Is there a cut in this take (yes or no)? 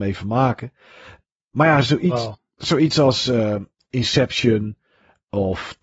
no